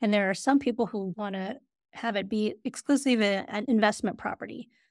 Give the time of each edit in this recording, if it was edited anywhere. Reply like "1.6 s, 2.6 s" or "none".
1.1 s